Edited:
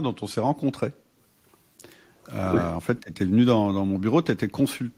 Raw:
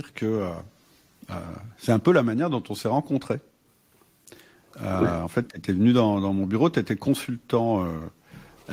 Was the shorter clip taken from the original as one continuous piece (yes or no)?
yes